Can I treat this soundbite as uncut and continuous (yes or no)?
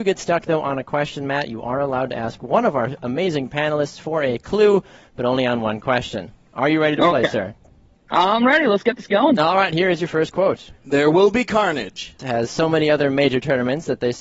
no